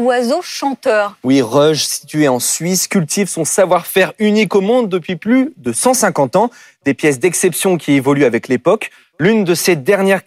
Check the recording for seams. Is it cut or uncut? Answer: uncut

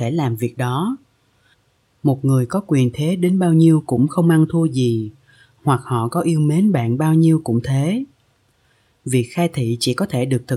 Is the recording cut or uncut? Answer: uncut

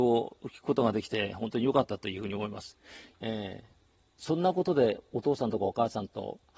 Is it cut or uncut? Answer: cut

